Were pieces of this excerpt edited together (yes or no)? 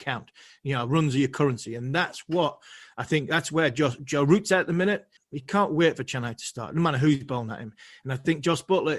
yes